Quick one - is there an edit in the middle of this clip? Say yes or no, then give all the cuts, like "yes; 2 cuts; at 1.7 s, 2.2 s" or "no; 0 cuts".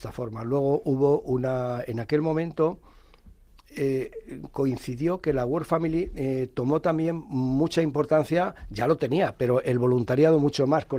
no; 0 cuts